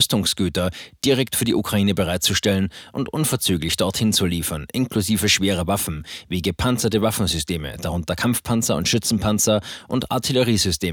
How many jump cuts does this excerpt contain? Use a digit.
0